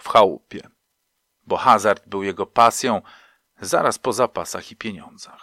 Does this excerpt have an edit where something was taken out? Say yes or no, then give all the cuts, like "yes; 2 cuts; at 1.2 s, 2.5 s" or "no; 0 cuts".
no; 0 cuts